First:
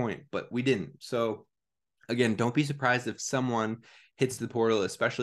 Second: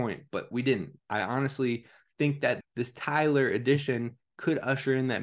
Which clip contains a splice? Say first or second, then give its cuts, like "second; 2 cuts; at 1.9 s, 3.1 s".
second; 2 cuts; at 1.0 s, 2.6 s